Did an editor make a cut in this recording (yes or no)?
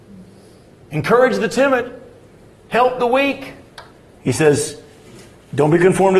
yes